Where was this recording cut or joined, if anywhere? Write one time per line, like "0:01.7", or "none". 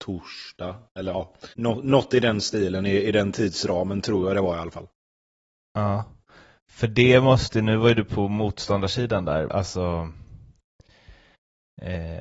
0:01.5
0:09.5